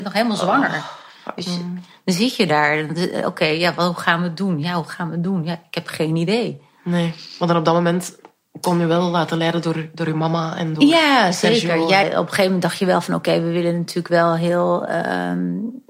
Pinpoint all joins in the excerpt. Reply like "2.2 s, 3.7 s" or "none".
12.0 s